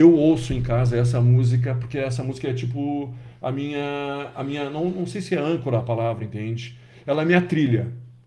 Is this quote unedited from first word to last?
yes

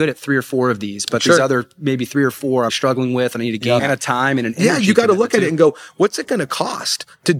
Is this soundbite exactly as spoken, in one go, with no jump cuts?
no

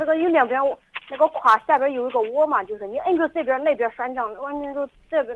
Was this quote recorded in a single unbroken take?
yes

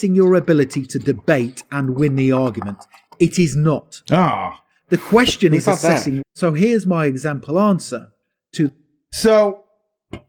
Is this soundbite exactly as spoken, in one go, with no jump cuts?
no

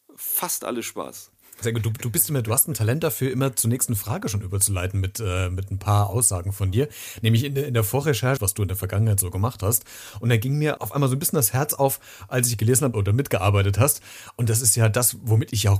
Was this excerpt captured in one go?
no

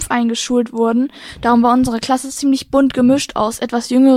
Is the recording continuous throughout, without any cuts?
yes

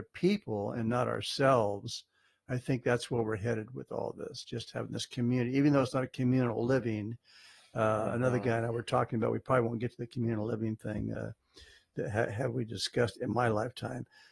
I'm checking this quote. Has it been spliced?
no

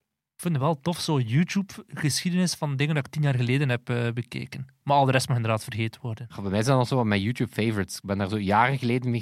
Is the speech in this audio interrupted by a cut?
no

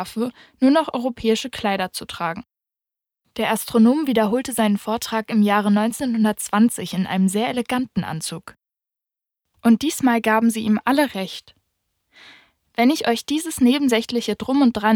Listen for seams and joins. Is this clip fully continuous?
yes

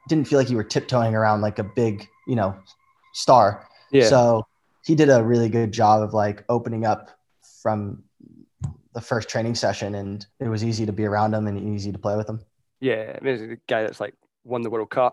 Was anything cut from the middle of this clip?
yes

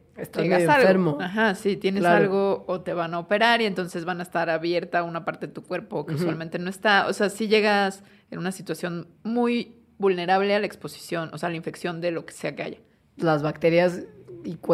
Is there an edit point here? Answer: yes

